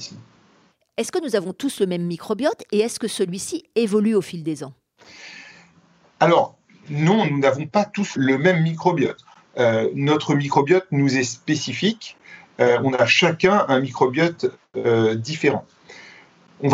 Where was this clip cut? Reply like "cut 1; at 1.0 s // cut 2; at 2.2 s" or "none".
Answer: none